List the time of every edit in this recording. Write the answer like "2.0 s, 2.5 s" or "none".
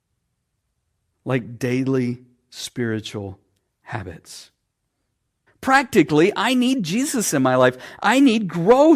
5.5 s